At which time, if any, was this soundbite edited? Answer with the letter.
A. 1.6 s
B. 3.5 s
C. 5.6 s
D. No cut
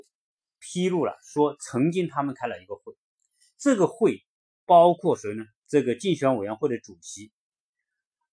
C